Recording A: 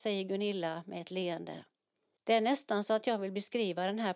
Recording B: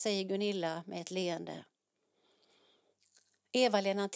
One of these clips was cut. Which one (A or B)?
A